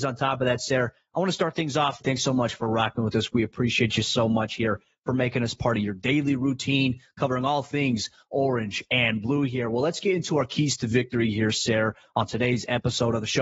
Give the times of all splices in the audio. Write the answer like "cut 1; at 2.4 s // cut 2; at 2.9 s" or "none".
cut 1; at 2.0 s

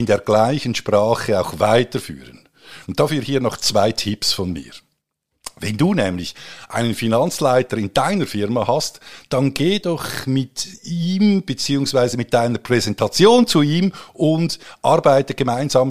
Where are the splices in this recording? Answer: none

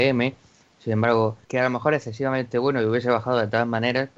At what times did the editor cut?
cut 1; at 1.4 s

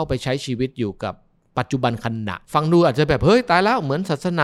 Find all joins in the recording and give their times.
cut 1; at 2.4 s

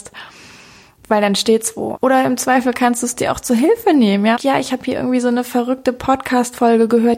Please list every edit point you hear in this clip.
cut 1; at 2.0 s // cut 2; at 4.4 s

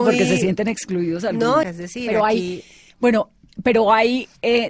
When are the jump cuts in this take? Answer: cut 1; at 1.6 s

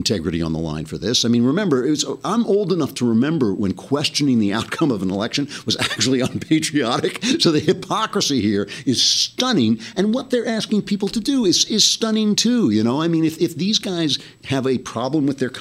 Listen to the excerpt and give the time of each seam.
none

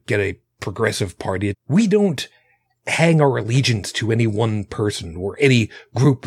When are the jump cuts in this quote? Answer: cut 1; at 1.5 s

